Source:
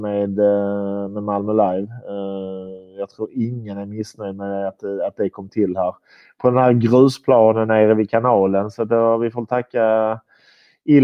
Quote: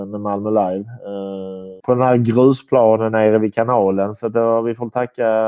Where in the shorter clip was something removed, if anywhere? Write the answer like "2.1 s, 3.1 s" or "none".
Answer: 1.8 s

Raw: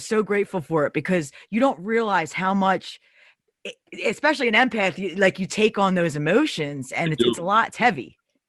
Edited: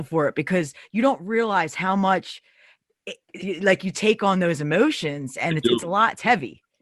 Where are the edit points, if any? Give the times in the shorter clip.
3.4 s

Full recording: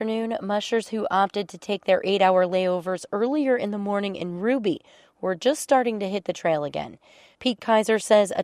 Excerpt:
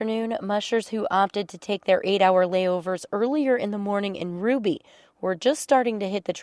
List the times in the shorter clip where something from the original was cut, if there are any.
none

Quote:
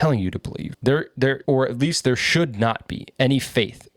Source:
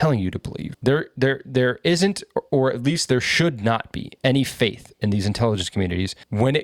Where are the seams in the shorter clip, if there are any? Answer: 1.4 s

